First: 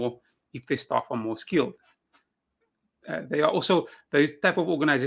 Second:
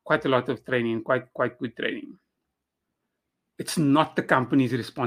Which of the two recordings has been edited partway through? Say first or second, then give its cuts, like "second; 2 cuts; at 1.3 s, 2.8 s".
second; 1 cut; at 3.5 s